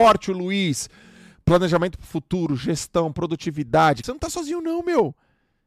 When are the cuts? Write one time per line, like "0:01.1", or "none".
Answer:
0:04.0